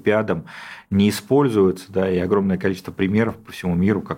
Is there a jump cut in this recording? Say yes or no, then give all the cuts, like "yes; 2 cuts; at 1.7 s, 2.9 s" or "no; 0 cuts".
no; 0 cuts